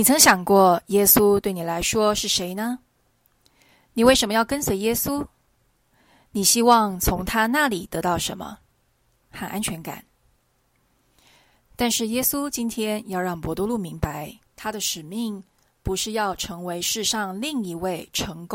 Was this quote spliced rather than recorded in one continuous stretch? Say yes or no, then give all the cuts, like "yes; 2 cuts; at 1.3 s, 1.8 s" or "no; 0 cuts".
yes; 2 cuts; at 9.2 s, 14.5 s